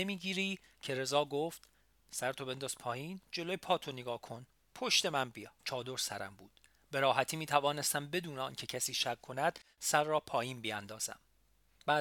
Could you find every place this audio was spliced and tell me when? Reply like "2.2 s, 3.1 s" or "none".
5.6 s